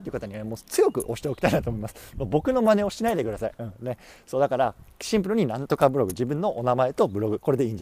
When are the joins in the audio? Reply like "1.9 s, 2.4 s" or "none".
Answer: none